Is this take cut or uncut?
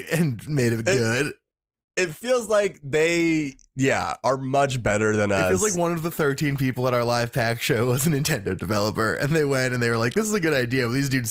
uncut